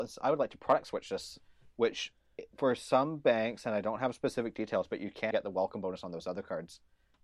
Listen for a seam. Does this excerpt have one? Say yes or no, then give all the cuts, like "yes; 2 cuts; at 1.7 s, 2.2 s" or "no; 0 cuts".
yes; 1 cut; at 5.3 s